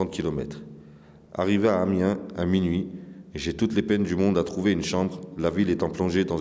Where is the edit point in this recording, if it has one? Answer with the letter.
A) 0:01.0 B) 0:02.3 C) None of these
C